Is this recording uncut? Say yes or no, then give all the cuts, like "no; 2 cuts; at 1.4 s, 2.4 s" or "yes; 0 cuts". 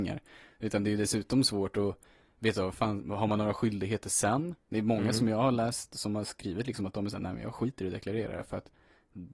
yes; 0 cuts